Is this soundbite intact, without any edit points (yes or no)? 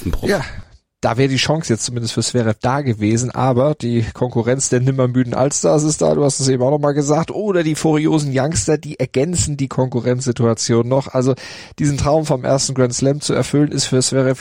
yes